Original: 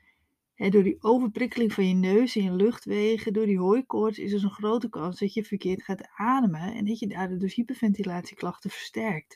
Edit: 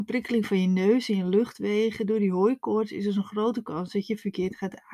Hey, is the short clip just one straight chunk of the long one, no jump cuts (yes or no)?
yes